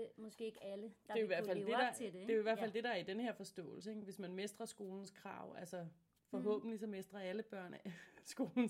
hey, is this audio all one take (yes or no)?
yes